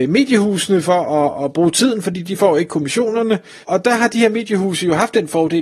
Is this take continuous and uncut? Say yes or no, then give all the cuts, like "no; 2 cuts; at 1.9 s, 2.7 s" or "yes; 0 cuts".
no; 1 cut; at 3.6 s